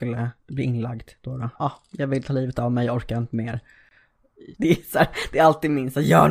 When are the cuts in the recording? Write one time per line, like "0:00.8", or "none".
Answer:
0:01.6
0:04.6